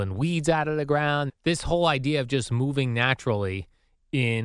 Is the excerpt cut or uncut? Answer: cut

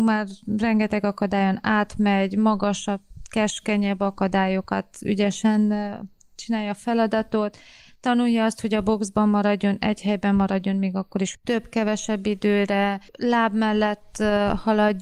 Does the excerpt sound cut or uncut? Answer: cut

